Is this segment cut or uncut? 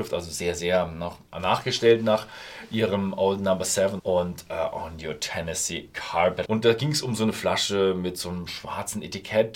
cut